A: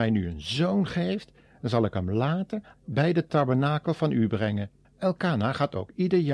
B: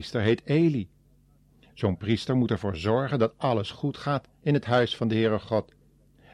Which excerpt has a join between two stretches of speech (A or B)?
A